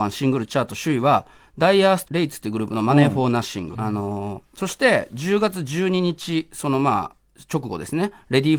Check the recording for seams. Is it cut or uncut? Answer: cut